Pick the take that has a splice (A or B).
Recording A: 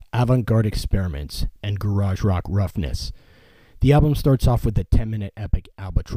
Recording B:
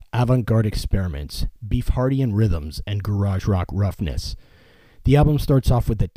A